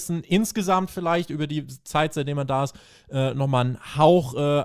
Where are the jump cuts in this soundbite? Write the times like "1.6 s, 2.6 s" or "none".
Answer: none